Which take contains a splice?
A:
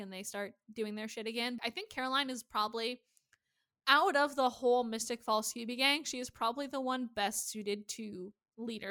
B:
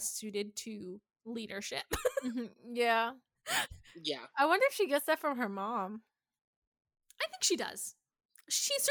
A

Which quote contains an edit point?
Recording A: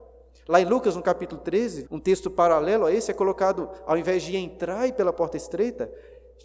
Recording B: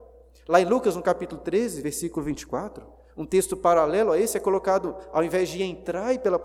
A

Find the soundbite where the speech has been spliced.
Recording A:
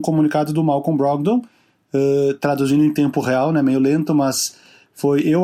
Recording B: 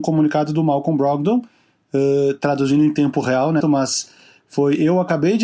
B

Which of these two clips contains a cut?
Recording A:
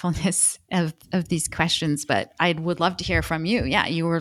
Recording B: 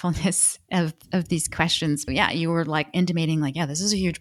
B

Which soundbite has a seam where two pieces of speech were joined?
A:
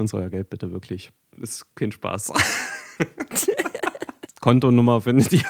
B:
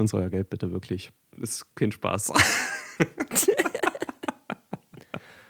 A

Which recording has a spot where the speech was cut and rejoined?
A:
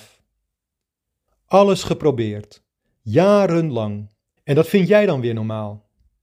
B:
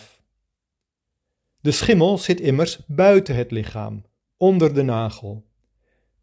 A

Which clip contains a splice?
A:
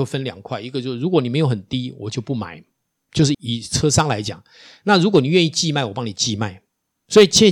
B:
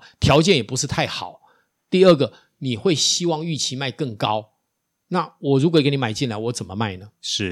A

